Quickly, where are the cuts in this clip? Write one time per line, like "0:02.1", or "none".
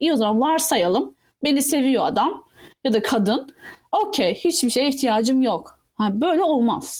none